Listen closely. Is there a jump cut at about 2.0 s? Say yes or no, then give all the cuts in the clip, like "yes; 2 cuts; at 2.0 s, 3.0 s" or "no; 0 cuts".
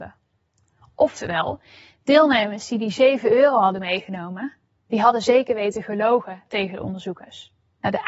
no; 0 cuts